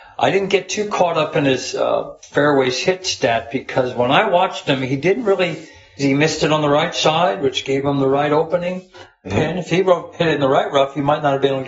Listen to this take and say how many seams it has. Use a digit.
2